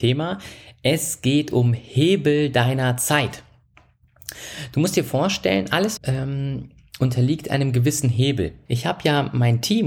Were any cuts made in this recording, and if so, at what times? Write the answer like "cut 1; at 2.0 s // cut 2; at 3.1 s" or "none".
cut 1; at 6.0 s // cut 2; at 8.7 s